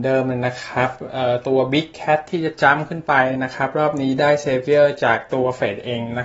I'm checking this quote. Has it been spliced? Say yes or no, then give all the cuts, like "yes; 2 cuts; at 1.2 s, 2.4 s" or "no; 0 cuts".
yes; 1 cut; at 3.3 s